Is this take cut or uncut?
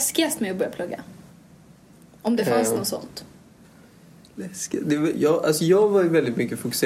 uncut